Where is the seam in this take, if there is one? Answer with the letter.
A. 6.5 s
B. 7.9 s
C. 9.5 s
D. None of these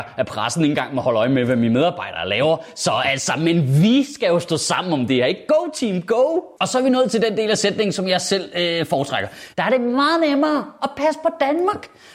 C